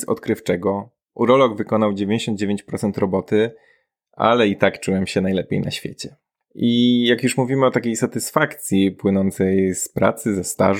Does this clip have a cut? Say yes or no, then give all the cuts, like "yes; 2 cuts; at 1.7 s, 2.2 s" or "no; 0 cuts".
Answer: no; 0 cuts